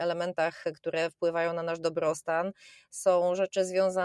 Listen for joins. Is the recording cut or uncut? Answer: uncut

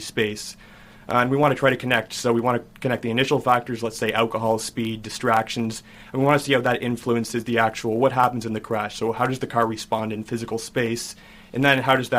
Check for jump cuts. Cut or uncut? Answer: uncut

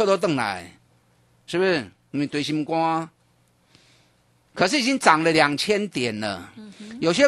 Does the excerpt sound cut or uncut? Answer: cut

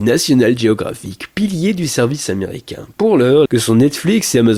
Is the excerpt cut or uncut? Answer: cut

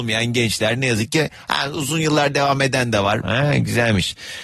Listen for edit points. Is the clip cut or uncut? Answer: cut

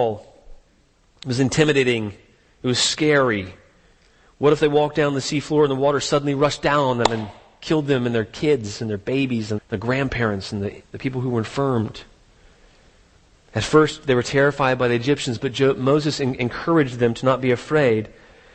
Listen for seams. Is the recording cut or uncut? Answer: cut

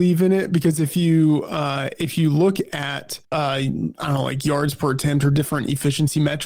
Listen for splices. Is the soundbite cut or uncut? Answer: cut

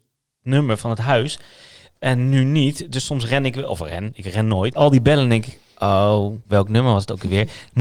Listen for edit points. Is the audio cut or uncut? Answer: cut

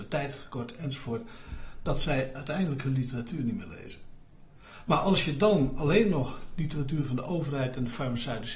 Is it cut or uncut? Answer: uncut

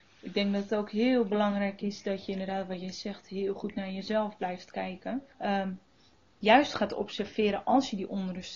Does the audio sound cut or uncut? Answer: cut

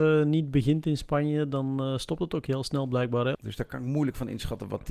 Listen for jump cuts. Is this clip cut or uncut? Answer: cut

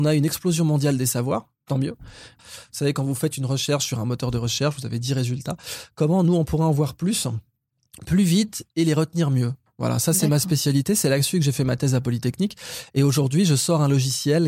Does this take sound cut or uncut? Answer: cut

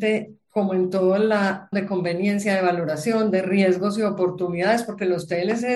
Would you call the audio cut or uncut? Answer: cut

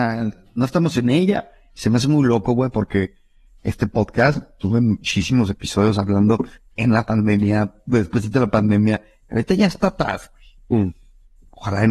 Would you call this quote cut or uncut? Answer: uncut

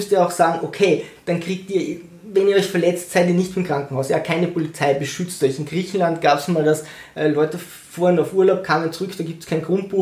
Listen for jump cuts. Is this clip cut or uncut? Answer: uncut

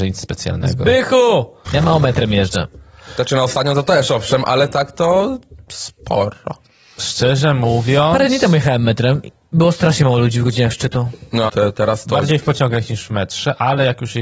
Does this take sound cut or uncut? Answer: cut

